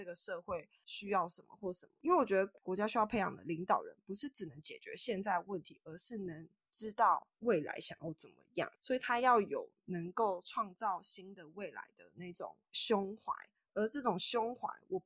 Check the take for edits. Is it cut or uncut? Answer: uncut